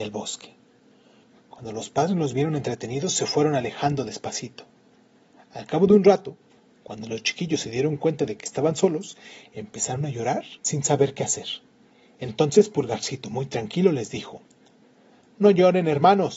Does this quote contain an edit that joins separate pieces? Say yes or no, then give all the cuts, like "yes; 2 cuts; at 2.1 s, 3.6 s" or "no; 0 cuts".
yes; 2 cuts; at 1.3 s, 10.6 s